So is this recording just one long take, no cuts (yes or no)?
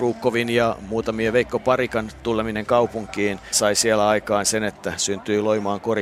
no